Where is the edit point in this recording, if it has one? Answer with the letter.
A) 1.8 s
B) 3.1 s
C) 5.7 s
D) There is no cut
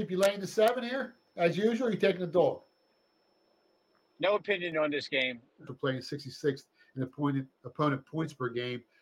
C